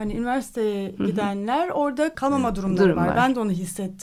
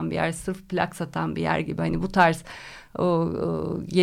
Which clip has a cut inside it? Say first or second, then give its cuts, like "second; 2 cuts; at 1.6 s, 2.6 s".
first; 1 cut; at 2.1 s